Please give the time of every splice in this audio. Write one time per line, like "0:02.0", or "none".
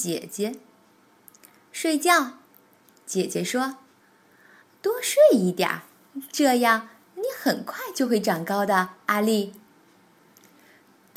none